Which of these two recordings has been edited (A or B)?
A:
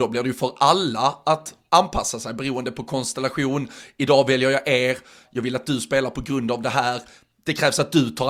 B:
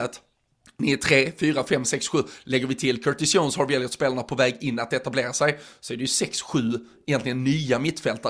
A